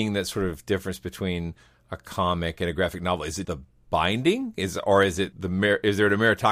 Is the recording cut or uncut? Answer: cut